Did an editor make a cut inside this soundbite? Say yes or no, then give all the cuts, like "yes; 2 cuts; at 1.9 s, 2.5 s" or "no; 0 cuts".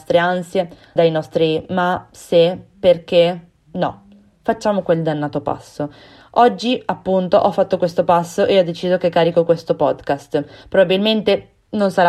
yes; 1 cut; at 1.0 s